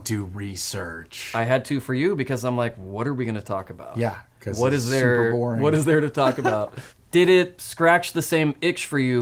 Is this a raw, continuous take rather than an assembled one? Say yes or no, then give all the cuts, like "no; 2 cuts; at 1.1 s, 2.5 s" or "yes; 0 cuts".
yes; 0 cuts